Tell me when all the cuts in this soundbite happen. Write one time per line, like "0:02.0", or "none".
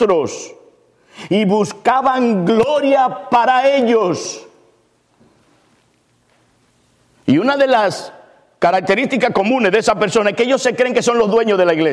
none